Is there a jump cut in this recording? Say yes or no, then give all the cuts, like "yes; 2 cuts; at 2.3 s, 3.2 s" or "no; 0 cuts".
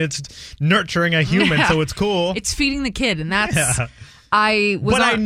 no; 0 cuts